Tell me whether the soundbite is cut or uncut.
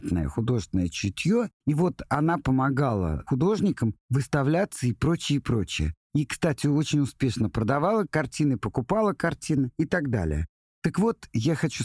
uncut